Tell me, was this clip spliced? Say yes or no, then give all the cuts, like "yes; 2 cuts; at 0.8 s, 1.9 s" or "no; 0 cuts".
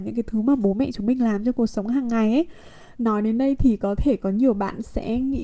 yes; 1 cut; at 3.0 s